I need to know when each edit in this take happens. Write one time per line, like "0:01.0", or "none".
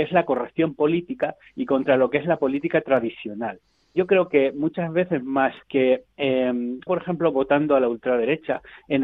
0:05.6
0:06.9